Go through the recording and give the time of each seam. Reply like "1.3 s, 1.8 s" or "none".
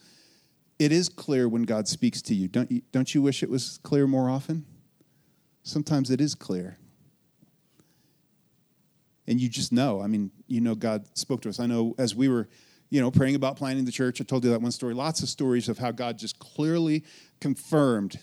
none